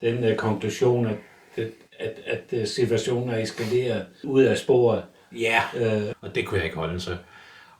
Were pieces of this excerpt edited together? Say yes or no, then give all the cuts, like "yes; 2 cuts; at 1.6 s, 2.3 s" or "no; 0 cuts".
yes; 2 cuts; at 4.2 s, 6.1 s